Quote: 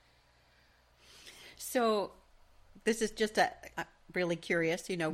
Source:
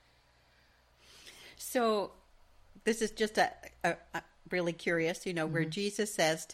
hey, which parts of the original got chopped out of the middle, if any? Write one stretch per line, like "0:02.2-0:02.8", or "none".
0:03.7-0:04.1